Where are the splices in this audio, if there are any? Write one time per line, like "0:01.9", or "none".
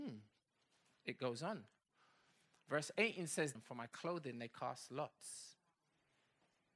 0:03.6

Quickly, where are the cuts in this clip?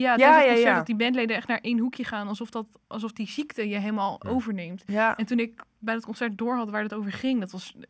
none

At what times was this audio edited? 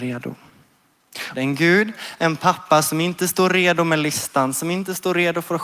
0:01.3

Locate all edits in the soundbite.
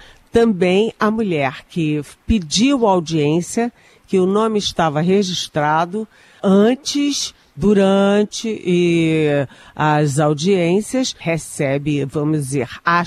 0:06.4
0:11.2

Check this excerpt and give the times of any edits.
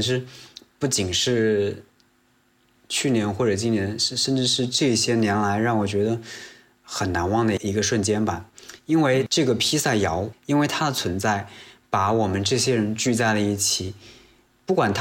0:10.3

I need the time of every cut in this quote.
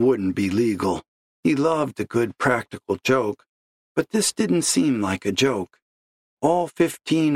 0:01.3
0:06.4

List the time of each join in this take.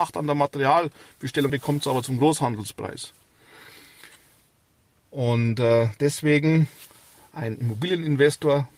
0:01.5

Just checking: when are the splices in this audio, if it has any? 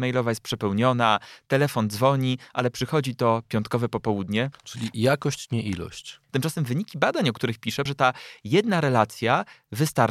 0:04.5
0:06.3
0:07.9

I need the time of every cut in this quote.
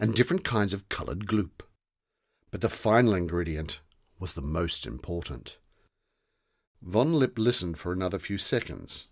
0:06.6

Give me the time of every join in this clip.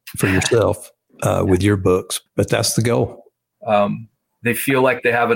0:02.3
0:03.5

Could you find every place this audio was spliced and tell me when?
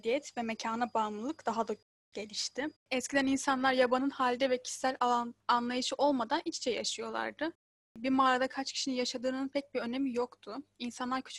0:02.8

